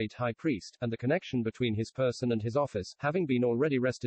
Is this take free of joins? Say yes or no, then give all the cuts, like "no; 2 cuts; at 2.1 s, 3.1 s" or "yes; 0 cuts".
yes; 0 cuts